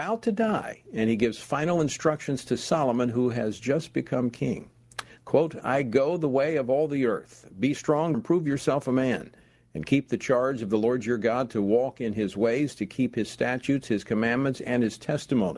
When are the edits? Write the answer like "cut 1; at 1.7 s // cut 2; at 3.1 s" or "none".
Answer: cut 1; at 8.1 s // cut 2; at 14.6 s